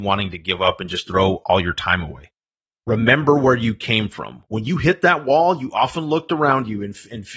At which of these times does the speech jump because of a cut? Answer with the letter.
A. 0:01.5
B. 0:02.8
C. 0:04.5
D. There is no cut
B